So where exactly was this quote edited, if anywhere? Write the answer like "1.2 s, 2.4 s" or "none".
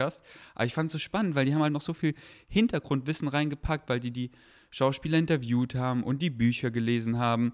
none